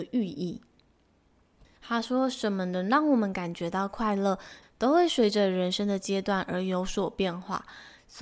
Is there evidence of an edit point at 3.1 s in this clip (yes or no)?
no